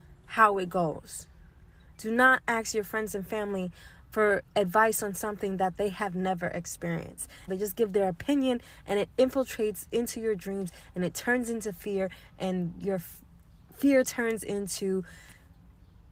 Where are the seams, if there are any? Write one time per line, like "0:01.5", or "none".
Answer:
0:07.5